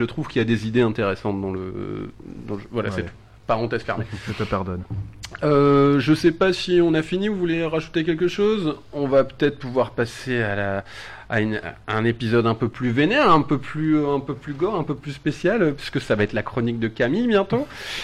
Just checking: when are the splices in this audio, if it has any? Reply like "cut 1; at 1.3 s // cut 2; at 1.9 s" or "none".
none